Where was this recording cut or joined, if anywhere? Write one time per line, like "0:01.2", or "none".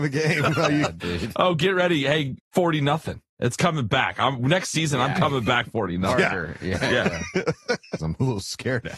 0:02.4
0:08.0